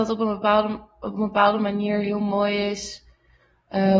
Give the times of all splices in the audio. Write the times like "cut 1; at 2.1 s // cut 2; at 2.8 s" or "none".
none